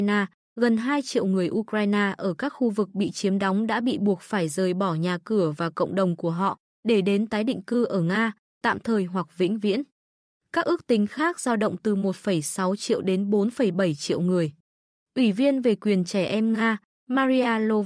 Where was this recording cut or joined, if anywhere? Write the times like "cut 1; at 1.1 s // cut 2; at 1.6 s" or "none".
none